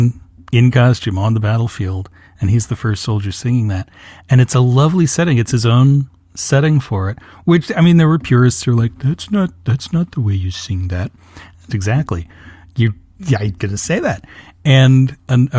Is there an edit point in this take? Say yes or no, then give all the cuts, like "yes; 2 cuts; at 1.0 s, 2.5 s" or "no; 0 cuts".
yes; 2 cuts; at 11.7 s, 13.6 s